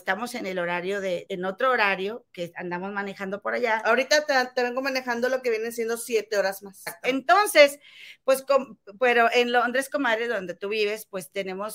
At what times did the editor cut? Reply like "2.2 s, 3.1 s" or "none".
1.3 s, 6.9 s